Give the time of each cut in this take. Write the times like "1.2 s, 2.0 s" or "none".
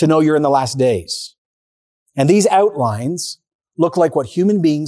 none